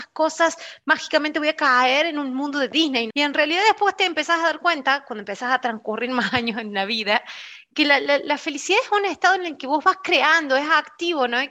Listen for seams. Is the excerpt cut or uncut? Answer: cut